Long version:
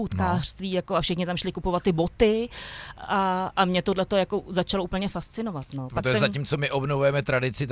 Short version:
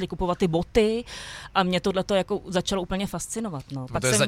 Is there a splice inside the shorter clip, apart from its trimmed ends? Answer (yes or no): yes